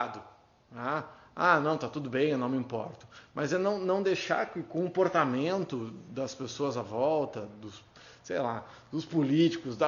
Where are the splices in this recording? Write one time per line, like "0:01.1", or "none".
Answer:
none